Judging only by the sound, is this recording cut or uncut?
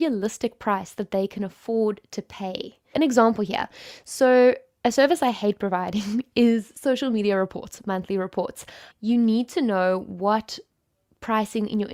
cut